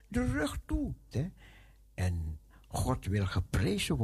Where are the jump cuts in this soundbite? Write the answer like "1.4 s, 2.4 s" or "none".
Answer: 1.1 s